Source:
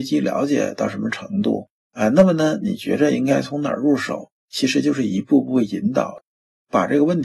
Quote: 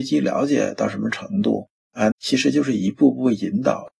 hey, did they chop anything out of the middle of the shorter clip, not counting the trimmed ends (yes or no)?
yes